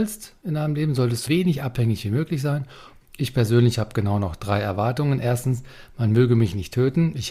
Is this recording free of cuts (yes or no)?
no